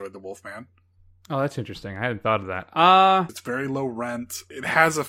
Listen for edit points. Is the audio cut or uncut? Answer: cut